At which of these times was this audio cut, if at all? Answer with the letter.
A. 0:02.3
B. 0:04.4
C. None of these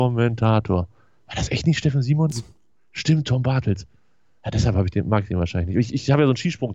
A